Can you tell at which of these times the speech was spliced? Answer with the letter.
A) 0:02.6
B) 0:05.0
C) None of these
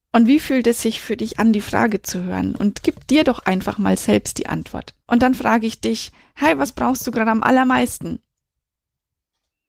B